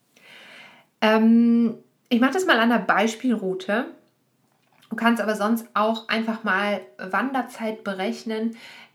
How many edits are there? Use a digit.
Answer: 0